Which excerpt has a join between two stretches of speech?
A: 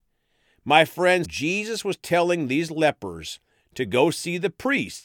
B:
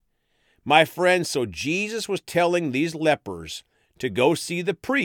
A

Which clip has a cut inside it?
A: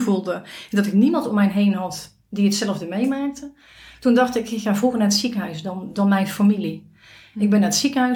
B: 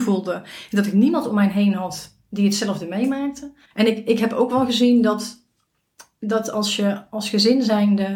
B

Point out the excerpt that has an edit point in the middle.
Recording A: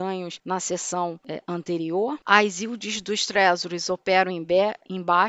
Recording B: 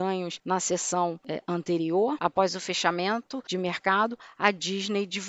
B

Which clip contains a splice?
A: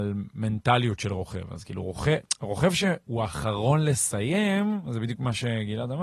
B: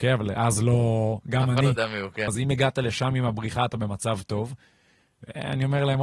B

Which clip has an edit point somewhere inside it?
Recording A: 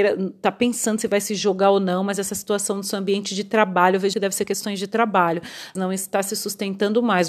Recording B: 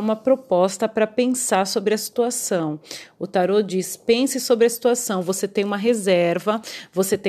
A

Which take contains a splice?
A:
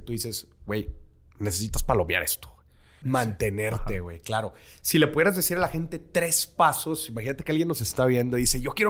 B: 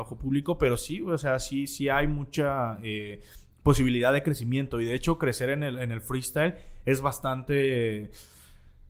A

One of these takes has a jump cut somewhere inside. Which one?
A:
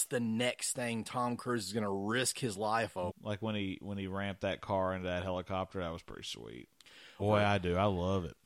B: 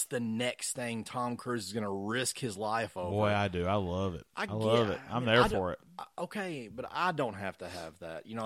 A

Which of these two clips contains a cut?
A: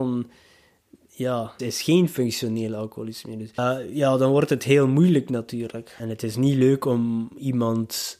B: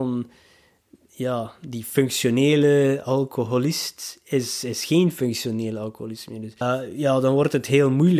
A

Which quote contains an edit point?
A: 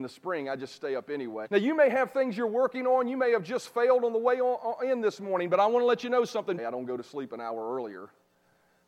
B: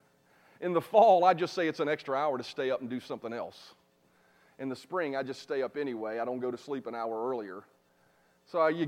A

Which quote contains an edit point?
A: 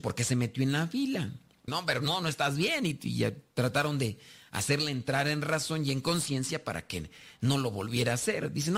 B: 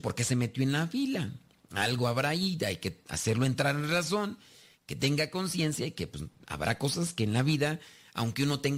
A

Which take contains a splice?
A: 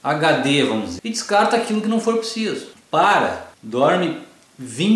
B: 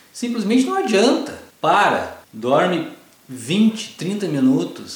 A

